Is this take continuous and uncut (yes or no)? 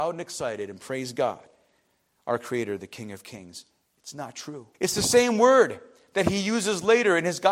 no